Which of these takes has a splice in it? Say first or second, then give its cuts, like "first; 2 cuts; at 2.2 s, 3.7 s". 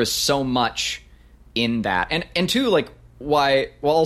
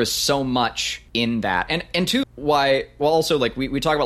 second; 2 cuts; at 1.1 s, 2.2 s